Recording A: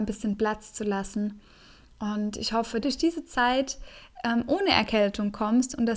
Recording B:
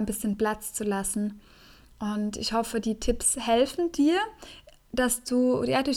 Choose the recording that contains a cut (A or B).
A